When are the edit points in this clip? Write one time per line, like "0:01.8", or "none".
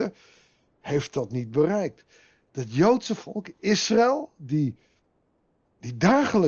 none